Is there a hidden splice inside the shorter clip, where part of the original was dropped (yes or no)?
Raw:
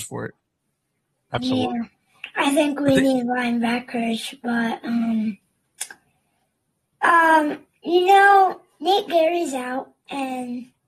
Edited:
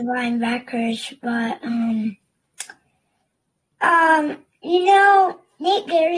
no